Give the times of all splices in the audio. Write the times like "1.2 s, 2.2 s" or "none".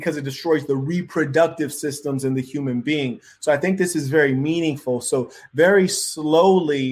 none